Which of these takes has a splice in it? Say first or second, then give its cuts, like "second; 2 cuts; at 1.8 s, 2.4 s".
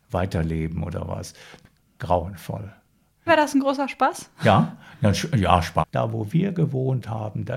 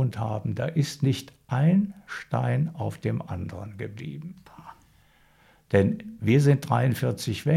first; 2 cuts; at 3.3 s, 5.8 s